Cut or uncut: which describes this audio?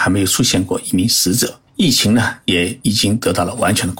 cut